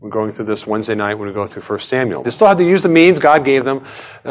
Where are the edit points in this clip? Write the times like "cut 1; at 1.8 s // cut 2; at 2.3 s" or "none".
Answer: cut 1; at 2.2 s